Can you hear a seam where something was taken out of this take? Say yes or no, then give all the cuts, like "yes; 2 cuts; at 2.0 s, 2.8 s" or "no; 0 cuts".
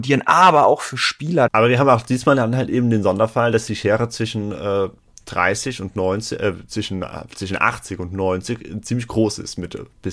yes; 1 cut; at 1.5 s